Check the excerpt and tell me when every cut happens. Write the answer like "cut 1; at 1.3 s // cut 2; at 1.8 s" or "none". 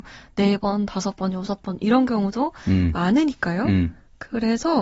none